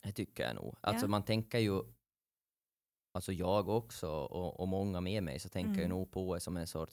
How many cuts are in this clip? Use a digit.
0